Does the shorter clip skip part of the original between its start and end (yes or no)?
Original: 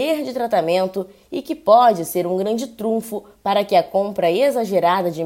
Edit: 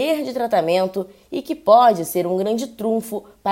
no